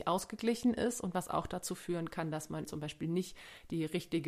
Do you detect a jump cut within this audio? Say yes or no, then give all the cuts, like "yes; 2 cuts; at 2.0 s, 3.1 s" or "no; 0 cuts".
yes; 1 cut; at 2.6 s